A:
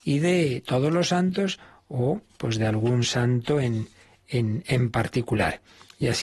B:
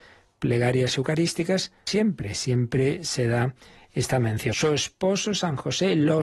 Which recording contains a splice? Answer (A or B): B